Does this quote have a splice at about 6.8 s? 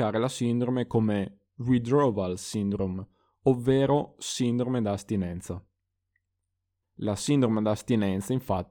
yes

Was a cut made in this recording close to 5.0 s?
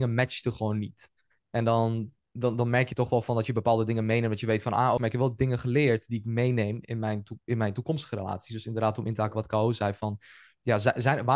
yes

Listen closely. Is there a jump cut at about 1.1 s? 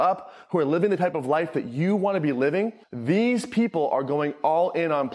no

